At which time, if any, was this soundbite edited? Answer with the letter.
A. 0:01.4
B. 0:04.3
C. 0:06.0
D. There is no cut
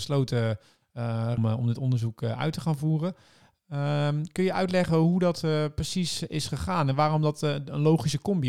A